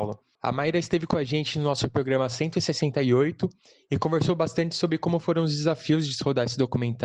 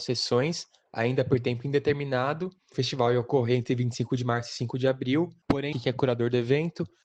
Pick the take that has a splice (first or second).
second